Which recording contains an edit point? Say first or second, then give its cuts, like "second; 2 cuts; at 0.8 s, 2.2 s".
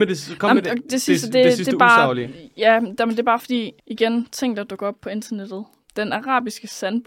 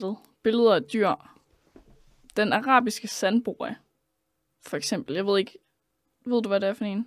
first; 2 cuts; at 3.8 s, 5.9 s